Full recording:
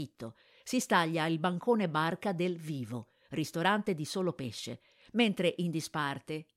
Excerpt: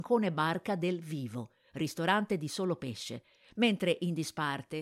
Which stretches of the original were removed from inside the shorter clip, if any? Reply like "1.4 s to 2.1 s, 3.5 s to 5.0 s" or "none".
none